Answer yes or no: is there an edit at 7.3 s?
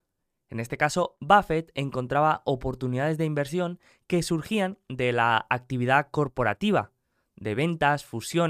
no